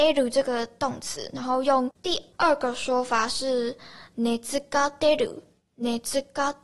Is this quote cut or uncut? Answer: cut